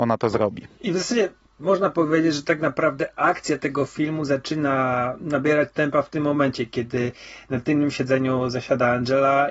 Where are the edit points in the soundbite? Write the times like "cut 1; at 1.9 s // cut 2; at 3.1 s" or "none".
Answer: none